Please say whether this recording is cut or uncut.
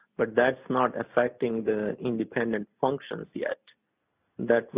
uncut